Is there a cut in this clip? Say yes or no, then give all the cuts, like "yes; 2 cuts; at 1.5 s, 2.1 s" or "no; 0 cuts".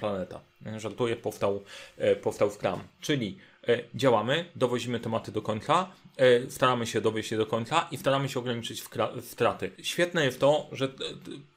yes; 1 cut; at 9.7 s